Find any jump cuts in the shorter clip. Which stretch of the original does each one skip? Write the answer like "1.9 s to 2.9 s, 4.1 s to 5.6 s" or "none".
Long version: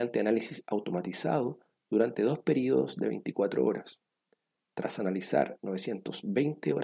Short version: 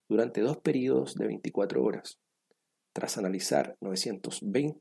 none